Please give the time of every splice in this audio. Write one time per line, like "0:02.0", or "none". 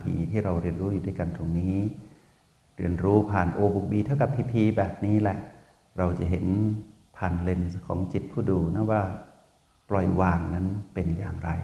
none